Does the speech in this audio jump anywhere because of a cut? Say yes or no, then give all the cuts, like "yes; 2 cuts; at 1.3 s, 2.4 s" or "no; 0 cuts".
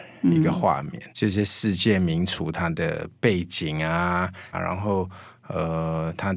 yes; 2 cuts; at 1.1 s, 4.5 s